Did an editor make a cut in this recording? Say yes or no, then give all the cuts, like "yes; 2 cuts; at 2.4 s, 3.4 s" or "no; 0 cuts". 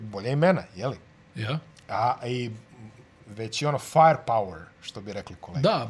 no; 0 cuts